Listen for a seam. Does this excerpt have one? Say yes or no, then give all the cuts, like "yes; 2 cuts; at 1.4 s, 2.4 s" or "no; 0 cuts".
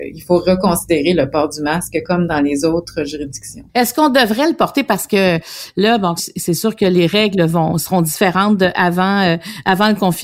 yes; 2 cuts; at 3.7 s, 6.2 s